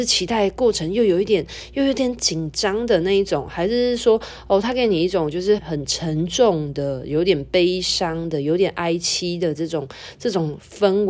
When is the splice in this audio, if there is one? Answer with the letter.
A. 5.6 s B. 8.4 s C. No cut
A